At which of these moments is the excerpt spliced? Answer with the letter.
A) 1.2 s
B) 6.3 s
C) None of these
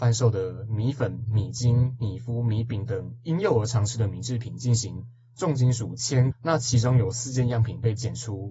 B